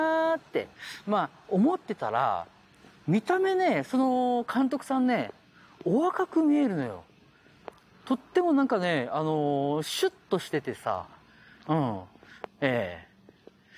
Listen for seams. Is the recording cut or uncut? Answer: cut